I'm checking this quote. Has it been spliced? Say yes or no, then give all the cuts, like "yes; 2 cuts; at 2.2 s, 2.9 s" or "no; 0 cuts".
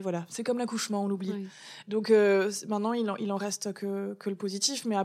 yes; 1 cut; at 1.8 s